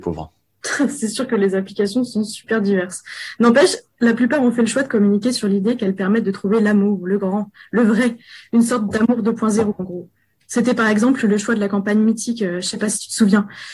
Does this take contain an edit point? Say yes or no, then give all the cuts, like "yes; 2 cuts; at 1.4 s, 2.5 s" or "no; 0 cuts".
no; 0 cuts